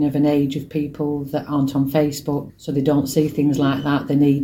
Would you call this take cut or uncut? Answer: cut